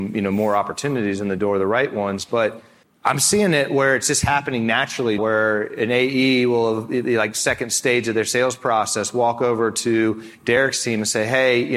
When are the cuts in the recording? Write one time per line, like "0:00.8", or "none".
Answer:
0:05.2